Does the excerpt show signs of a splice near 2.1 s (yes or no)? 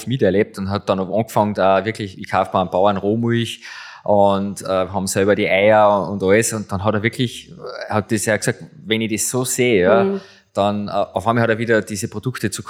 yes